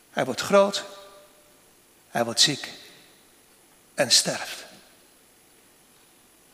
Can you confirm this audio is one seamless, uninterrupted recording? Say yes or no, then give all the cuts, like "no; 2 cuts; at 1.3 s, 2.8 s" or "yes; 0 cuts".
yes; 0 cuts